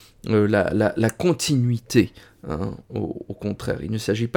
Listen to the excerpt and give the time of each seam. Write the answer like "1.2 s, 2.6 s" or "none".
none